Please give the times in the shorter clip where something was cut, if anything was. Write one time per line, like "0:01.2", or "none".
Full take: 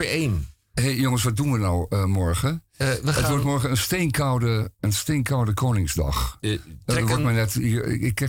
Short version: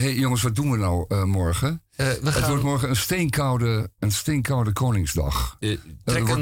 none